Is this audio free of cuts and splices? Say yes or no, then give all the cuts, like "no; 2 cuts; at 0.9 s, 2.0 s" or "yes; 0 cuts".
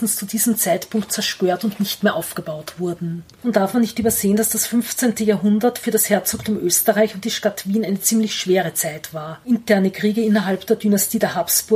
no; 1 cut; at 3.3 s